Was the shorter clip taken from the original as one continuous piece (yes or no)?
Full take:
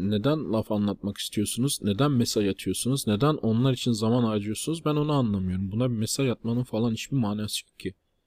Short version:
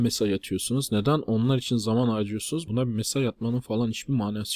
no